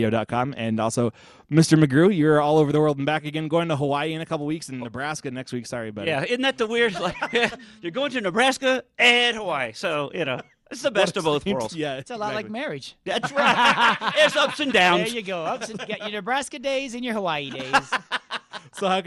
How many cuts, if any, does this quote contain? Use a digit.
0